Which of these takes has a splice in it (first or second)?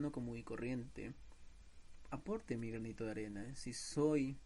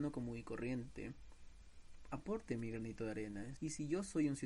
second